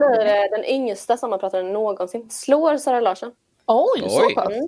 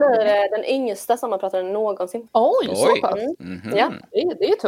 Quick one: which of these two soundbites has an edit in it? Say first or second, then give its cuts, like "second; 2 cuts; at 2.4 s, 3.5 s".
second; 1 cut; at 2.3 s